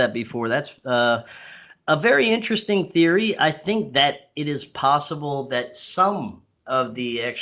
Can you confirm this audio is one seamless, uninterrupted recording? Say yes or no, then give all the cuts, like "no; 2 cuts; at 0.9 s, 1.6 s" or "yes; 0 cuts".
yes; 0 cuts